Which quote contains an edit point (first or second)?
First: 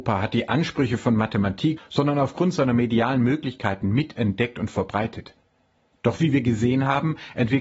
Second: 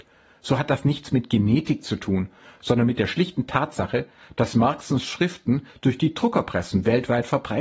first